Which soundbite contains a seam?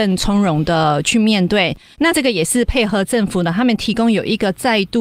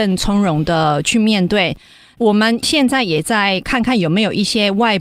first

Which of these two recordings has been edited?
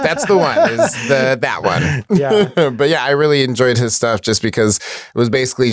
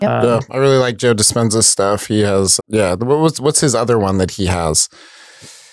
second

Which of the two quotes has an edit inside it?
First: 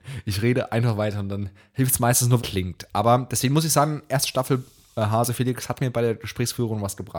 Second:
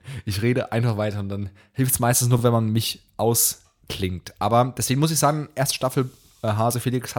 first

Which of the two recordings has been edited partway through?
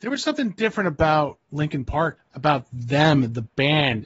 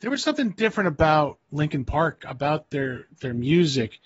first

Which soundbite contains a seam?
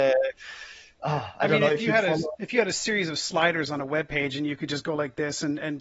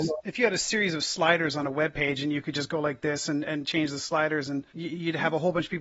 second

